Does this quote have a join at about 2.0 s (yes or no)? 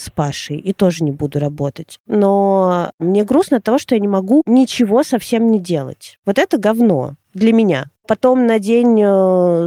no